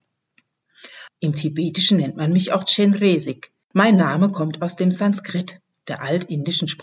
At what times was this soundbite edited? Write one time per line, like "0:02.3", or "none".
0:01.1
0:03.6